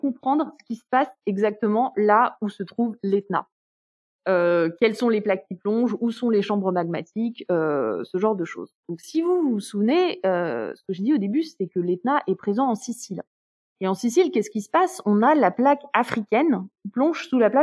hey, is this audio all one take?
yes; 0 cuts

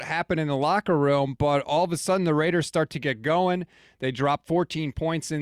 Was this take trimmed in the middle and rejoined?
no; 0 cuts

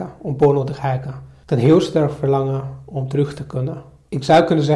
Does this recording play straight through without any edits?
yes; 0 cuts

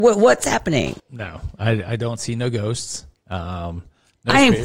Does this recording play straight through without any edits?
no; 1 cut; at 1.0 s

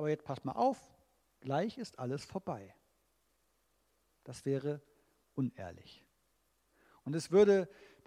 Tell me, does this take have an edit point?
no; 0 cuts

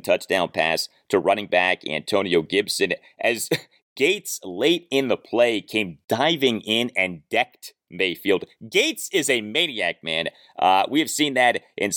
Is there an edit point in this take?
no; 0 cuts

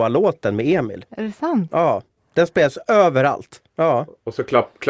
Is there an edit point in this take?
yes; 2 cuts; at 1.1 s, 3.7 s

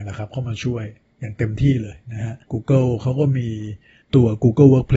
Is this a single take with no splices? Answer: no; 1 cut; at 2.4 s

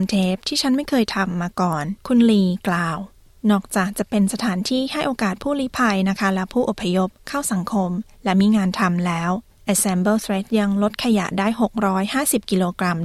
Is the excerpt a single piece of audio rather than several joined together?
no; 1 cut; at 2.0 s

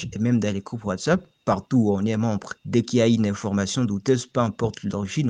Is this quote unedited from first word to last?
no; 1 cut; at 2.6 s

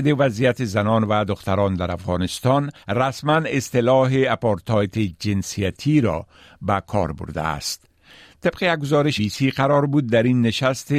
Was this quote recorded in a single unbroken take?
no; 2 cuts; at 2.8 s, 9.2 s

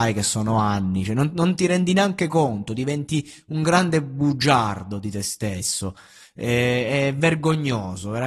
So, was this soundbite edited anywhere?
no; 0 cuts

